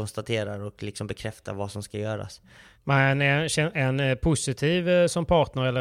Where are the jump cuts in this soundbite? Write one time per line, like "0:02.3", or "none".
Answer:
none